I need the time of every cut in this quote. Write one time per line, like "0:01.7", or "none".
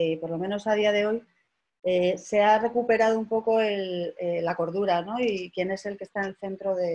none